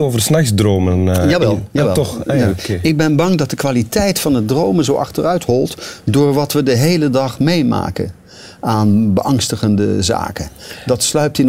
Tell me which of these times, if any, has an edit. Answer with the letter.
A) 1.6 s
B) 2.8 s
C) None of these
C